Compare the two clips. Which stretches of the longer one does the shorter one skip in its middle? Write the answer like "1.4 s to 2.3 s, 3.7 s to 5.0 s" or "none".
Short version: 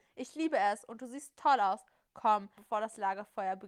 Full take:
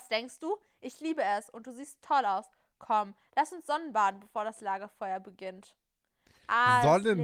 3.2 s to 4.2 s